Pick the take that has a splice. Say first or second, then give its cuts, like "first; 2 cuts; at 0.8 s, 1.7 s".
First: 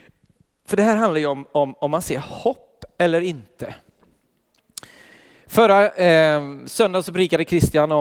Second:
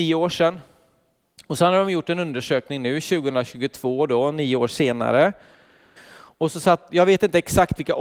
second; 2 cuts; at 1.4 s, 6.0 s